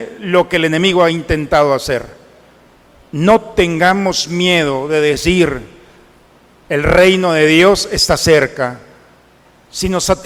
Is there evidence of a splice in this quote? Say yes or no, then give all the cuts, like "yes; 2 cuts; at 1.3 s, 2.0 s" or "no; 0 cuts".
no; 0 cuts